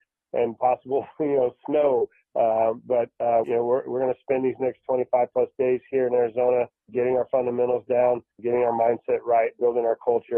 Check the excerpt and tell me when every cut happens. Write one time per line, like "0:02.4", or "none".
0:03.4
0:06.9
0:08.4